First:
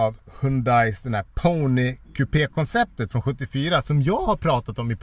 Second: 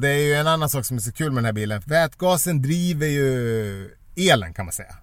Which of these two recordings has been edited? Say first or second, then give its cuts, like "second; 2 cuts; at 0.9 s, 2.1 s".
second; 1 cut; at 1.8 s